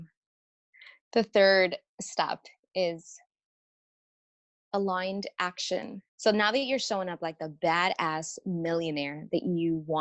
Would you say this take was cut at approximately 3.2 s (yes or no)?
no